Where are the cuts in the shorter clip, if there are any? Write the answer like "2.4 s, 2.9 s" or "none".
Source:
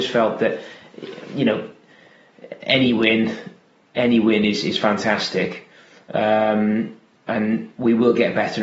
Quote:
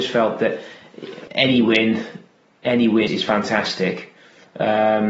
1.3 s, 3.1 s